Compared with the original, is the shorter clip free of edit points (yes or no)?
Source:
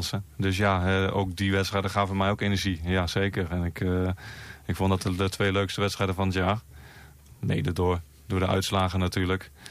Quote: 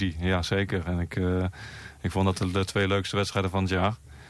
yes